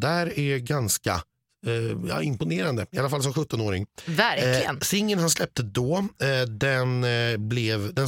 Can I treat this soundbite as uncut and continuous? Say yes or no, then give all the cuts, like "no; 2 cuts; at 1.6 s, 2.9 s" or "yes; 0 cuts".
yes; 0 cuts